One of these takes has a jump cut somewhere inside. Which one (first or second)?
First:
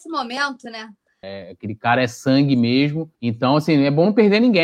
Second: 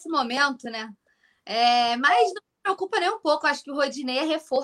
first